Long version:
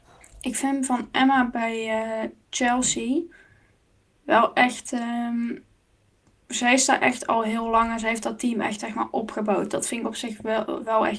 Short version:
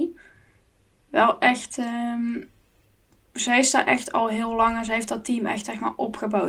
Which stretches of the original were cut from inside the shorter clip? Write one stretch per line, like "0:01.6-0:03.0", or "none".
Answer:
none